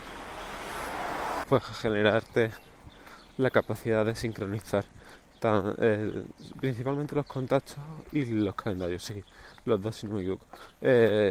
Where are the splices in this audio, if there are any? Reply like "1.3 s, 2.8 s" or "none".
1.4 s